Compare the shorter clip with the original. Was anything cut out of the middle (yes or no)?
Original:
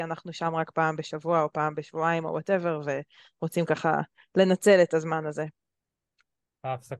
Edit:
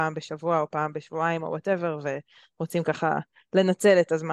no